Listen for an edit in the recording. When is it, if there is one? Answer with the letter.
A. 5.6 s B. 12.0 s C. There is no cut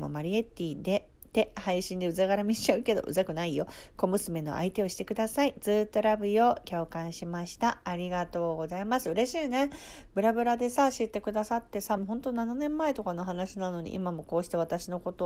B